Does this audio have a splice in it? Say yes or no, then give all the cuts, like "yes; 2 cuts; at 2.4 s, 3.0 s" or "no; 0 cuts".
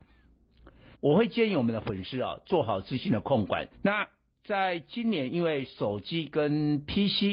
yes; 2 cuts; at 0.9 s, 3.7 s